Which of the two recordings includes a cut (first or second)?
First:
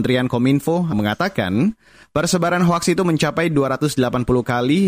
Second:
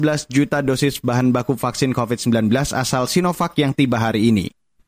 first